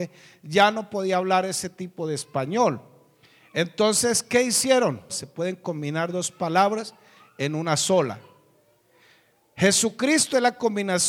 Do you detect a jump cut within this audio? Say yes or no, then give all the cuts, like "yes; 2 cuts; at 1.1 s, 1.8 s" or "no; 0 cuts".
yes; 1 cut; at 5.1 s